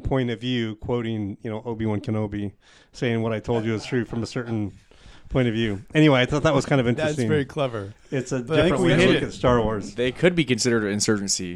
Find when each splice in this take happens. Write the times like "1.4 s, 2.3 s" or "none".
none